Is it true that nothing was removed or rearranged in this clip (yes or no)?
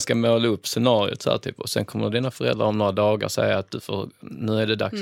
yes